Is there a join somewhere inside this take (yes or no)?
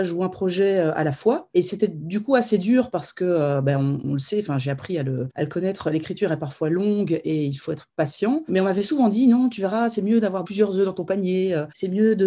yes